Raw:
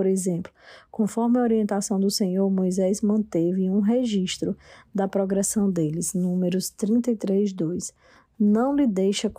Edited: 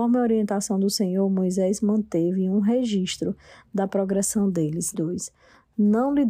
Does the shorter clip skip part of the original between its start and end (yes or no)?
yes